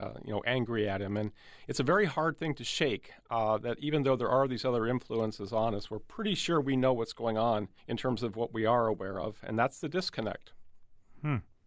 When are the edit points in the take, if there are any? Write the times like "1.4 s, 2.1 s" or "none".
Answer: 7.8 s